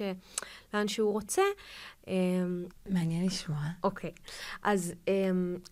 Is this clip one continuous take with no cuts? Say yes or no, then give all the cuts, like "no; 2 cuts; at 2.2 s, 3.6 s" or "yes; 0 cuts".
no; 1 cut; at 2.7 s